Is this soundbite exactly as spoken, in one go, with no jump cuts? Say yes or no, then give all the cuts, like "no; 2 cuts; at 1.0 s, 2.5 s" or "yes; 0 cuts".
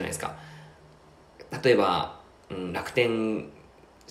yes; 0 cuts